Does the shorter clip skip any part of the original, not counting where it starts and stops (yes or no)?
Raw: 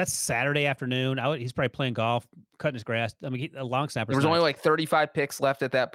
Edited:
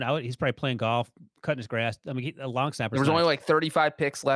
no